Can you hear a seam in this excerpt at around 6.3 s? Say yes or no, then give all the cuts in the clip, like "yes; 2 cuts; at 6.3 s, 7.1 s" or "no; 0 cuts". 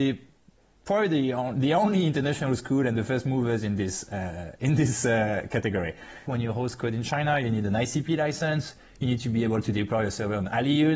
yes; 1 cut; at 6.3 s